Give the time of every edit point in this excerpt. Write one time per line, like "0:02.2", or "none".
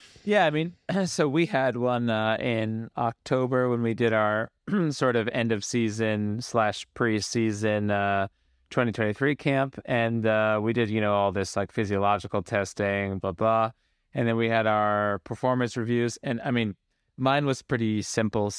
0:13.2